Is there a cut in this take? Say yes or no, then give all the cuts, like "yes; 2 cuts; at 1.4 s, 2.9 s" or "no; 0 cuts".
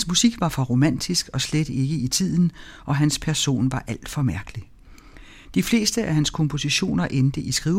no; 0 cuts